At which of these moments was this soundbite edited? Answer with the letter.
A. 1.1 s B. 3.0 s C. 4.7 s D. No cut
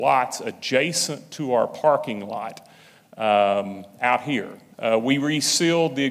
C